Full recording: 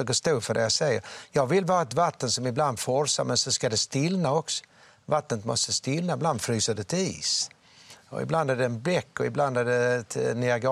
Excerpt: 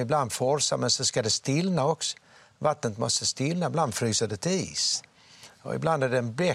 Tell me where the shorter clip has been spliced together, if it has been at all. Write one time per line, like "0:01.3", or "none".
none